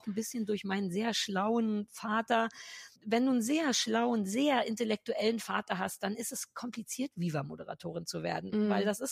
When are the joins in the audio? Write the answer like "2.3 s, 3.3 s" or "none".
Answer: 3.0 s